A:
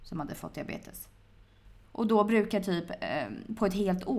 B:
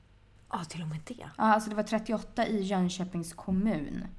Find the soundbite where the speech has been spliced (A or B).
A